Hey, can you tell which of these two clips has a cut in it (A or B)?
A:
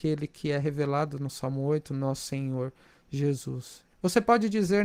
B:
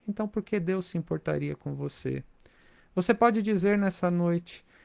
A